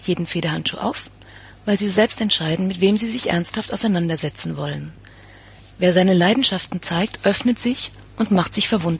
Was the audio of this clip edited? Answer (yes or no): no